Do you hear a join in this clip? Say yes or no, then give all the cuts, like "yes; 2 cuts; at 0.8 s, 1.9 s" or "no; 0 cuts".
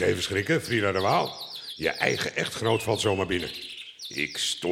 no; 0 cuts